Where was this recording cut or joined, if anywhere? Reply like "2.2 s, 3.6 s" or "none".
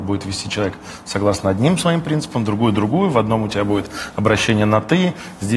none